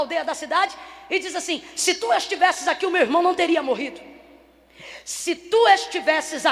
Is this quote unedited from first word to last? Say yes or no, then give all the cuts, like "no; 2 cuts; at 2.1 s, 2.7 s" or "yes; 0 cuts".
yes; 0 cuts